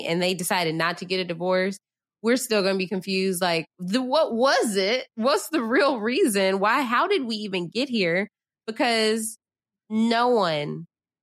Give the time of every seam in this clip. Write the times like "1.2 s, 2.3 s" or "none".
none

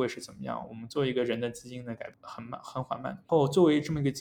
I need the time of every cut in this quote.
3.2 s

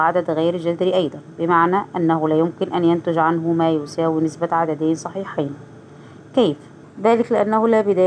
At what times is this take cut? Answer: 6.8 s

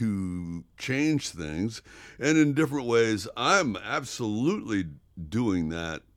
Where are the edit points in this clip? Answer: none

